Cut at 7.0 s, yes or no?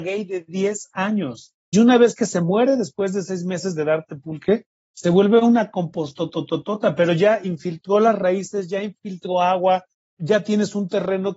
no